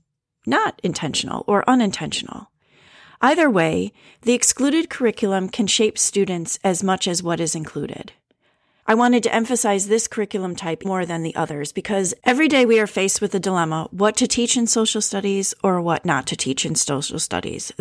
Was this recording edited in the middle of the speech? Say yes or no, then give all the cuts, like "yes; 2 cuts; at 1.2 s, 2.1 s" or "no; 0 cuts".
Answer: yes; 2 cuts; at 8.8 s, 10.8 s